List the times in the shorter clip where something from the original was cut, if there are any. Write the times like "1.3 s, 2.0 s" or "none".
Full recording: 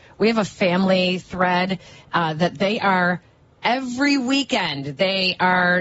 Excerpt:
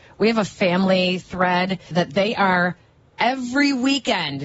1.9 s